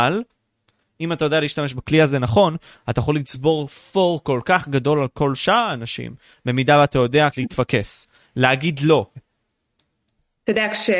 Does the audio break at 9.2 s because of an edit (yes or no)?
yes